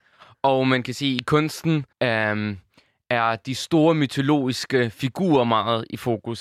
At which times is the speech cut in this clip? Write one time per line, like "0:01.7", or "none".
0:01.9

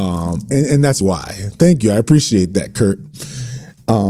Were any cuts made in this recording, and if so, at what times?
0:01.0

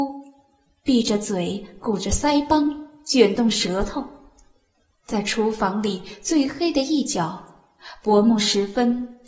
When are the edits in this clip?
0:04.9

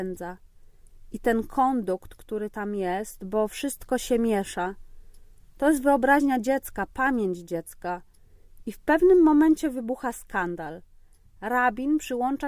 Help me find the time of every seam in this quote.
none

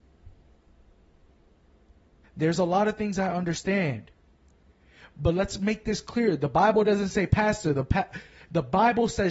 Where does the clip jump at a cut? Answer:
0:02.2

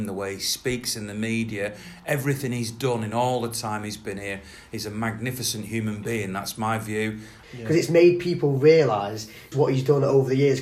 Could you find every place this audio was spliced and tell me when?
0:07.4
0:09.5

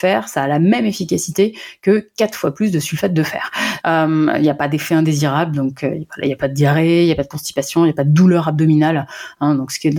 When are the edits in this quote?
0:03.8

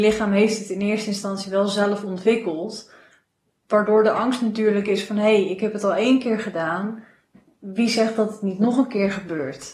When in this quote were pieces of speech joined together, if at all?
none

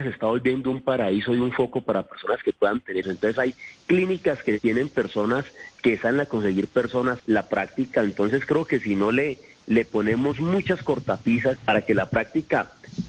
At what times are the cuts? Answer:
0:03.0
0:07.2
0:11.6

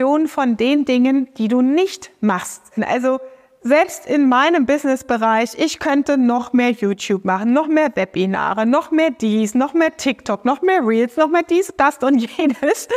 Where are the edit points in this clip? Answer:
0:02.8

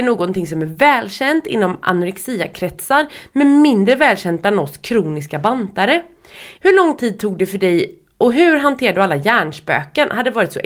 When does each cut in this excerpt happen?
0:06.5

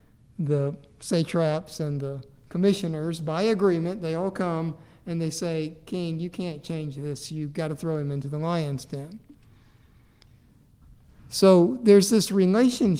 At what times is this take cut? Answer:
none

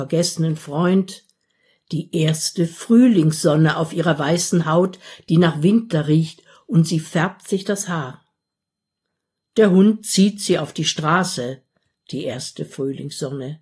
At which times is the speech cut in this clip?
none

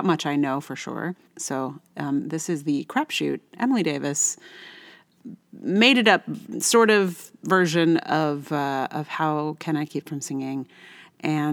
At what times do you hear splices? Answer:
0:01.3

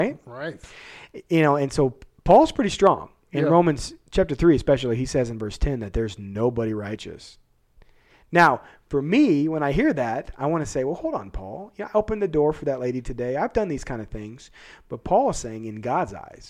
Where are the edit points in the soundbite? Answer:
none

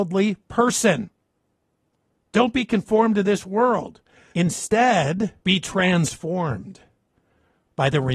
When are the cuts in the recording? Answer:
0:04.3
0:05.4

